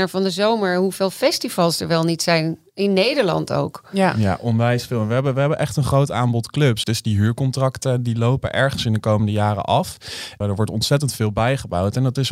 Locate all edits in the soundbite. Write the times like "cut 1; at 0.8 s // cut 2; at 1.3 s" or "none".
cut 1; at 6.8 s // cut 2; at 10.4 s

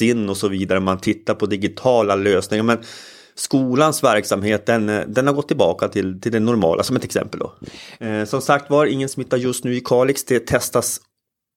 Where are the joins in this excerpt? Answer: cut 1; at 8.0 s

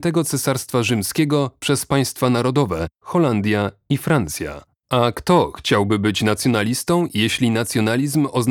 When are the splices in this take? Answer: cut 1; at 3.0 s // cut 2; at 4.8 s

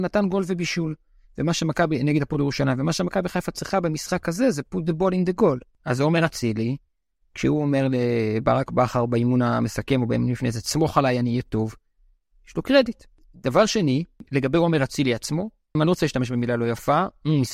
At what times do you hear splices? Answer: cut 1; at 15.8 s

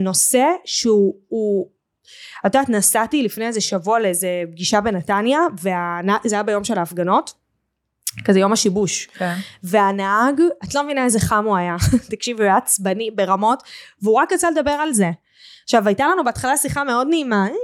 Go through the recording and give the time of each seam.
none

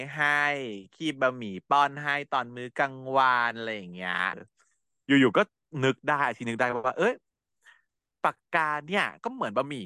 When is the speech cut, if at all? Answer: cut 1; at 4.3 s // cut 2; at 8.4 s

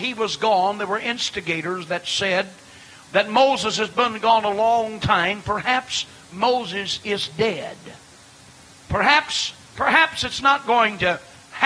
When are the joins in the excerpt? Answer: none

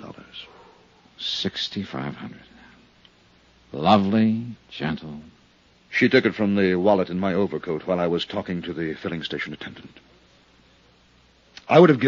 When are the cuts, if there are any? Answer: cut 1; at 4.6 s

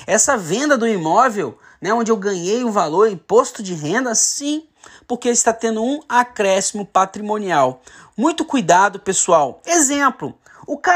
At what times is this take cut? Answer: cut 1; at 9.6 s

